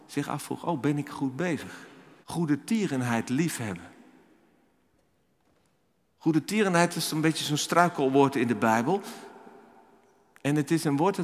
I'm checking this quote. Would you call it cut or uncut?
cut